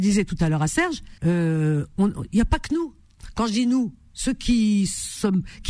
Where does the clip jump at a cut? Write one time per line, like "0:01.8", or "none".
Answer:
0:01.2